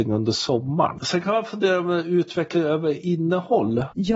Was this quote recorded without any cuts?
yes; 0 cuts

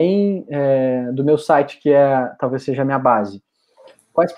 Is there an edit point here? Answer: no; 0 cuts

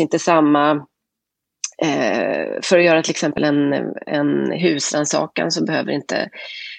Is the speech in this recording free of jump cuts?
yes; 0 cuts

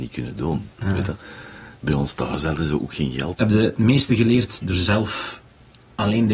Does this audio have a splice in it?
yes; 2 cuts; at 3.3 s, 4.6 s

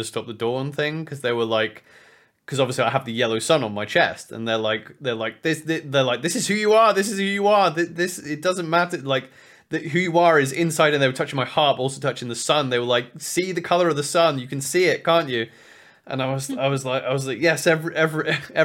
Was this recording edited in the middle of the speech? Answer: no; 0 cuts

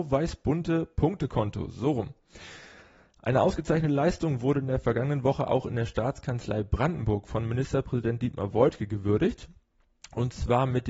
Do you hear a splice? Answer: no; 0 cuts

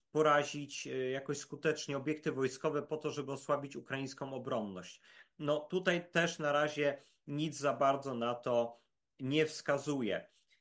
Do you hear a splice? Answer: no; 0 cuts

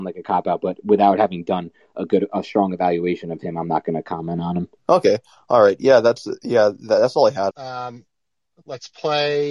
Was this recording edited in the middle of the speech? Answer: yes; 2 cuts; at 4.8 s, 7.5 s

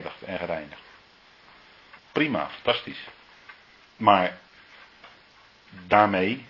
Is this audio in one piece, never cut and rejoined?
no; 2 cuts; at 2.0 s, 3.8 s

